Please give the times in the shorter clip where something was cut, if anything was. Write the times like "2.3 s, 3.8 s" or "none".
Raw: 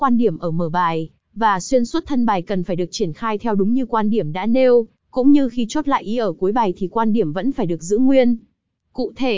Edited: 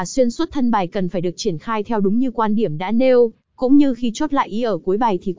none